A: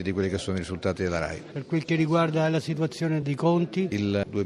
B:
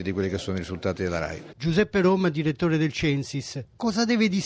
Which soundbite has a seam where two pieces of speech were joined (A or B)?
B